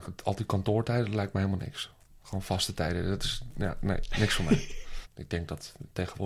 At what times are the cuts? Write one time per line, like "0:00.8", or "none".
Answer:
0:05.0